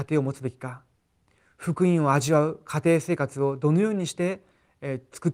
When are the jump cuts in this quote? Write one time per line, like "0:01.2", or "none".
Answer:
none